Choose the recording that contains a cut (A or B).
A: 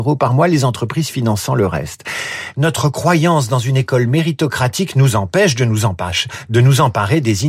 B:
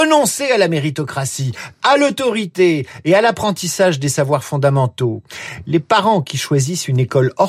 A